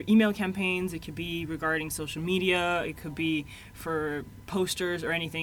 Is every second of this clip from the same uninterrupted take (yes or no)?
yes